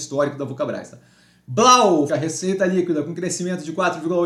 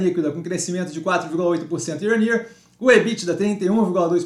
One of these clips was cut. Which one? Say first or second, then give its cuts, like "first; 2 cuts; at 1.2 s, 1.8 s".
first; 1 cut; at 2.1 s